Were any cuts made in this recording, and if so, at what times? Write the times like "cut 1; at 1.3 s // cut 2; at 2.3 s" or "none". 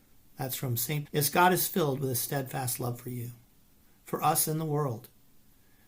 cut 1; at 1.1 s